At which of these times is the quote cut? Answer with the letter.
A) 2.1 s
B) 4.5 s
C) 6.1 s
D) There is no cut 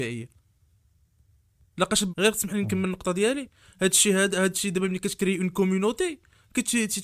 A